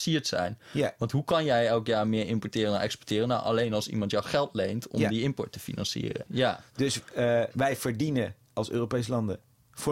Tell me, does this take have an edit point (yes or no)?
yes